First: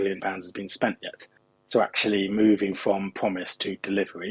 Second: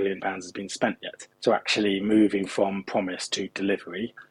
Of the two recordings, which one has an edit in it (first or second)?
second